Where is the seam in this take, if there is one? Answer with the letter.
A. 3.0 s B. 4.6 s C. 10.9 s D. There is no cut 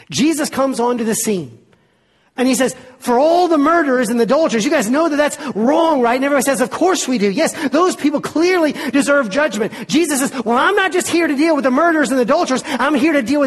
D